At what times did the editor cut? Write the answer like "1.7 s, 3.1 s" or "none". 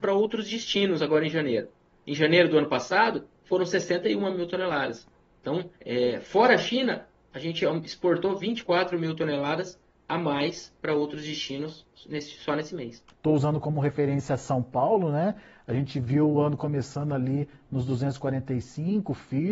5.8 s, 13.1 s